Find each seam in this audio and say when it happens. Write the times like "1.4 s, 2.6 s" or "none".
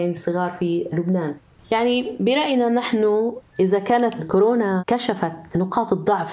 1.6 s